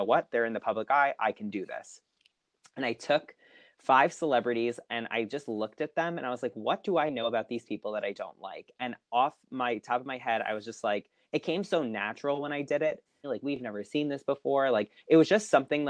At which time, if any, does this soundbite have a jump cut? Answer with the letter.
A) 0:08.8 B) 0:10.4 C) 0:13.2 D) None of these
C